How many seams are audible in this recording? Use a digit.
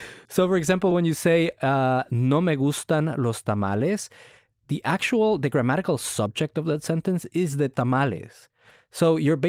0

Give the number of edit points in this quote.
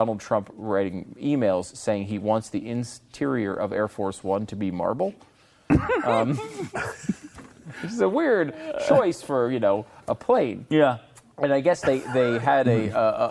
0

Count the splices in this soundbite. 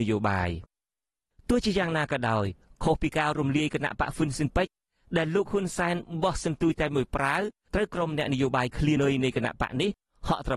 1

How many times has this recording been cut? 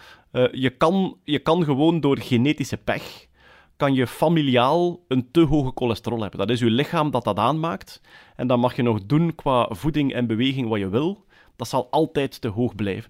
0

